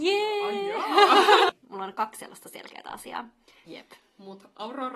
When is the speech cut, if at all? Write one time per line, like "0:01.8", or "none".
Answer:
0:01.5
0:03.7